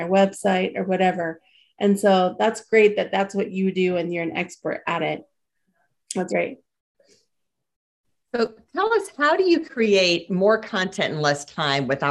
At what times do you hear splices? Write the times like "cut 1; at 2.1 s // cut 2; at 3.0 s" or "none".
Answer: cut 1; at 6.3 s